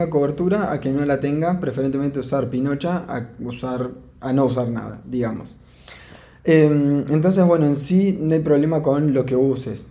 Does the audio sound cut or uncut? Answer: uncut